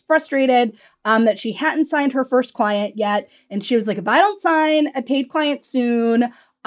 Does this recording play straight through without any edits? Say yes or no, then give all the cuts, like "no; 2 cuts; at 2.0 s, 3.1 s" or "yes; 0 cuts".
yes; 0 cuts